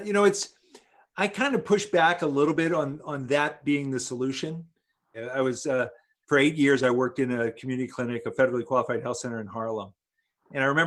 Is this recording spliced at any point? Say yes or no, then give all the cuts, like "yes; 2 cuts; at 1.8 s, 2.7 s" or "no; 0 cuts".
yes; 1 cut; at 5.1 s